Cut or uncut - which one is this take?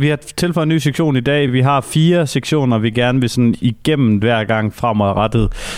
uncut